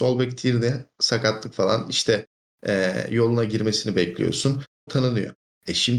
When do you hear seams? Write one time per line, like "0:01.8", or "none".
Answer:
0:04.9